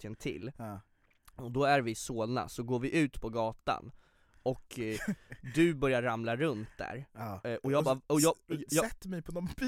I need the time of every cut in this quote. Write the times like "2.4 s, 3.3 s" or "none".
none